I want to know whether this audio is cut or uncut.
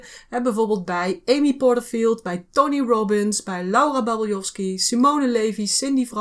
uncut